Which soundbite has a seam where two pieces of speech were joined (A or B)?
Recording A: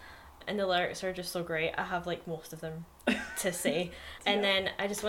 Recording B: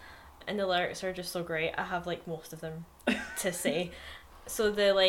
A